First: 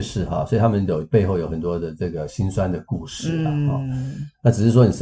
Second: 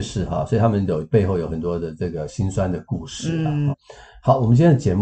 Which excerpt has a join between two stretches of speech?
second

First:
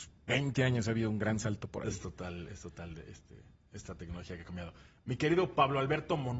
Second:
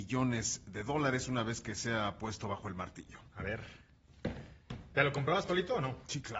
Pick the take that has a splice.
second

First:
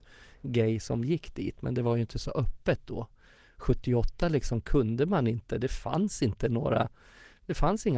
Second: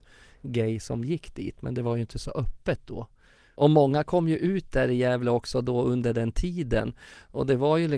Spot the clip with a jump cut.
second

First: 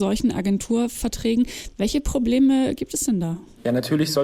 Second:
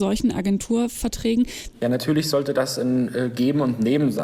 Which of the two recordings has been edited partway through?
second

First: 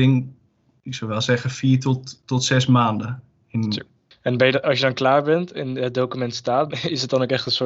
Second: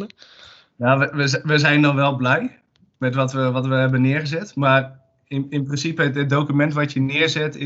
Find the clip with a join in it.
first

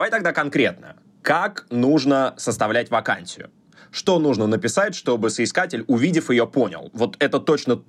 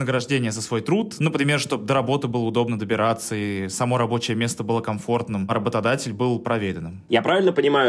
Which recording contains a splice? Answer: second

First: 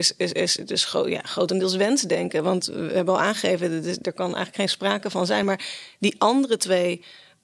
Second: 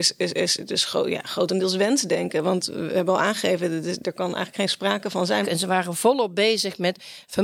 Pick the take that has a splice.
second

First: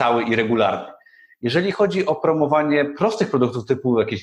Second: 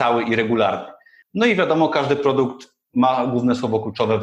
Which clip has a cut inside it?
second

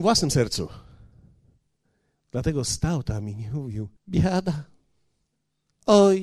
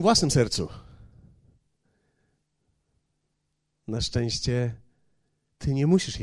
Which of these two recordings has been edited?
first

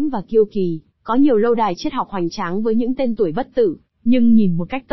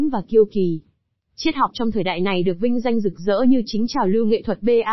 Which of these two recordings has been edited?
first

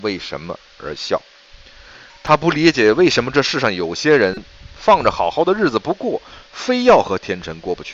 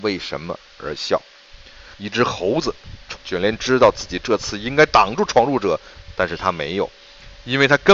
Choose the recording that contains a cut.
second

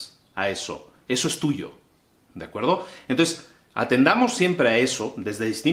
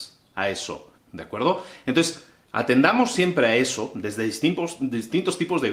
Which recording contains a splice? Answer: second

